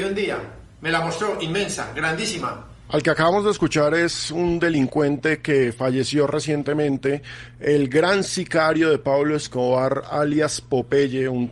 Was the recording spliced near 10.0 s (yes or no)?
no